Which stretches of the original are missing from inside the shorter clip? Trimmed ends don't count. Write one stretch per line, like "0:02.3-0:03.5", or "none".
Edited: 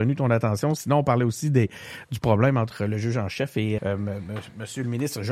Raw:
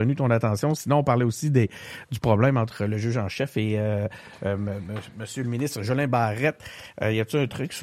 0:03.8-0:04.4